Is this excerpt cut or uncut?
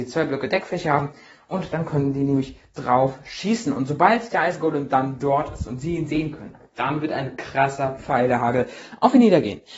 uncut